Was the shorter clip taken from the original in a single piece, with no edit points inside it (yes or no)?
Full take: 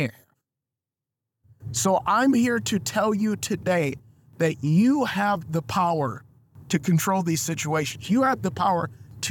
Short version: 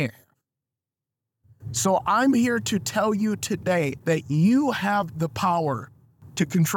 no